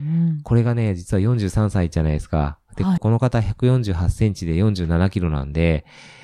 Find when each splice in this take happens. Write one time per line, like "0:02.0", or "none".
0:03.0